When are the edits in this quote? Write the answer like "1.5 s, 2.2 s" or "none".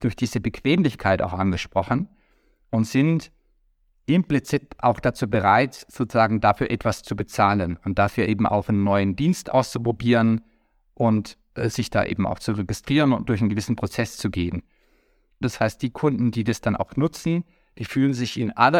15.4 s